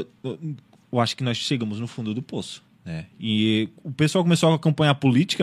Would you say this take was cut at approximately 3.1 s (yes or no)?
yes